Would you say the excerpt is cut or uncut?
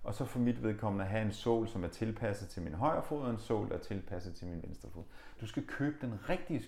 cut